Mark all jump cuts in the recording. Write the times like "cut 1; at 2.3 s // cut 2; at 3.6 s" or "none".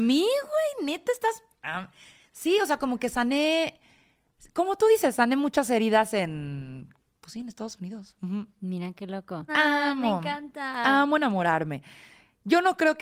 cut 1; at 9.5 s